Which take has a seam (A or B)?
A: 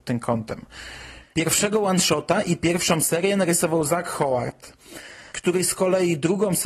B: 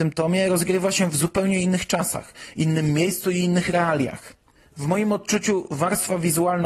A